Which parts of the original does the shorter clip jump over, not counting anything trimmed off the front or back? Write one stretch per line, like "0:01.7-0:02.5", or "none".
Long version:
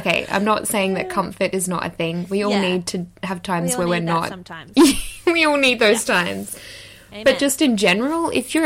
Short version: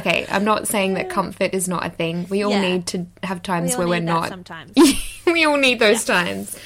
none